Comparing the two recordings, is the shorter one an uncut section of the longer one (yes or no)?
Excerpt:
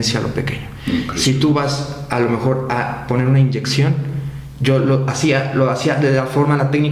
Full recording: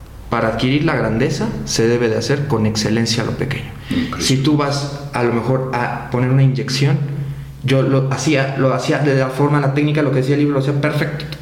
yes